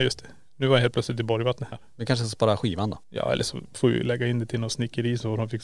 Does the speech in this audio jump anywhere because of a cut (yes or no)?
yes